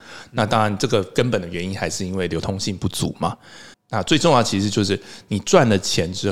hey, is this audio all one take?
no; 1 cut; at 3.7 s

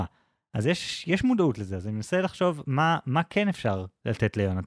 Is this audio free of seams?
yes; 0 cuts

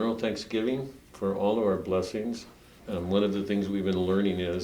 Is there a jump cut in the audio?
yes; 2 cuts; at 1.0 s, 2.8 s

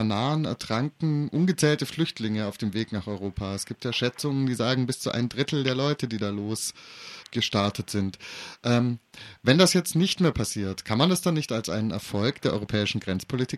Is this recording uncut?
no; 1 cut; at 7.2 s

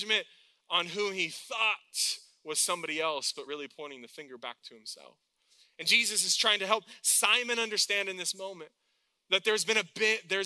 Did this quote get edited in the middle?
no; 0 cuts

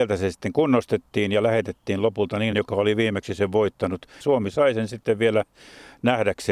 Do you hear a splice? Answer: yes; 2 cuts; at 2.5 s, 4.2 s

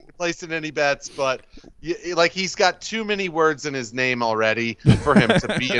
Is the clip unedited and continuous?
yes; 0 cuts

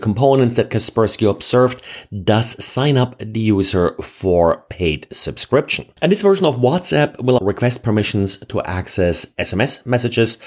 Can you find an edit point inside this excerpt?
yes; 2 cuts; at 6.0 s, 7.4 s

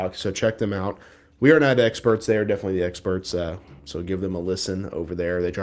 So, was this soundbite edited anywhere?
no; 0 cuts

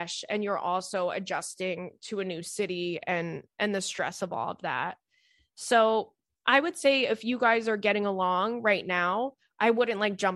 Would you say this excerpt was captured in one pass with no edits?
yes; 0 cuts

